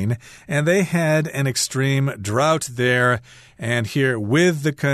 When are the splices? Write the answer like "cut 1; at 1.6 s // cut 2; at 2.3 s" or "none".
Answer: none